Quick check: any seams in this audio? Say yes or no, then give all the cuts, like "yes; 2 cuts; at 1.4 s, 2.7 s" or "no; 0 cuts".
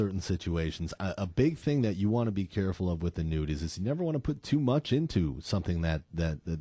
no; 0 cuts